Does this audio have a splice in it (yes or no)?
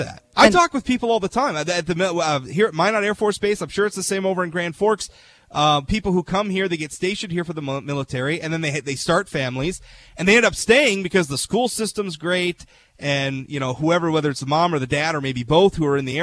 no